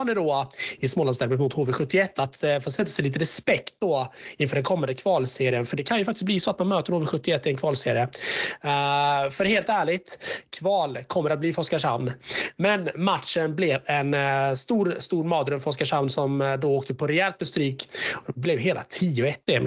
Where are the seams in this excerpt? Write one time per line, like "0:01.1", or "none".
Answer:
none